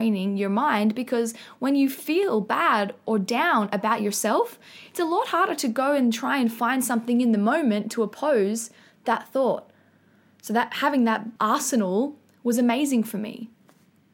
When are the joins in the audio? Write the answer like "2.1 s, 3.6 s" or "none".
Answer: 11.4 s